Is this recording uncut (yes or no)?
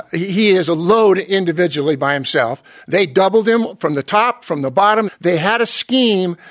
no